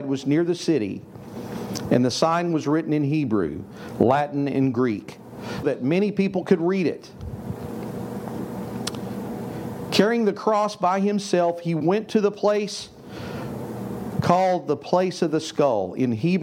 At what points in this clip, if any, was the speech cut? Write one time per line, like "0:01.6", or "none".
0:05.6
0:09.9